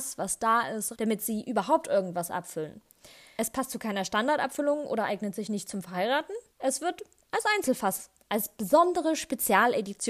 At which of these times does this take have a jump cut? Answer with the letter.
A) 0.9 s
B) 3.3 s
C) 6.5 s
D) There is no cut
A